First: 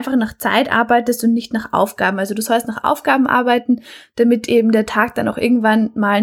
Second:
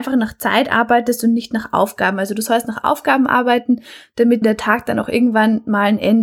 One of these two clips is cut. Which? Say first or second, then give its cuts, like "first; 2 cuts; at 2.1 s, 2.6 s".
second; 1 cut; at 4.4 s